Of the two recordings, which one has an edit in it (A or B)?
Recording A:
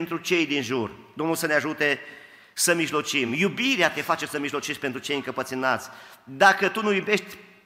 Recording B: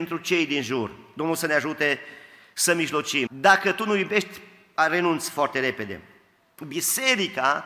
B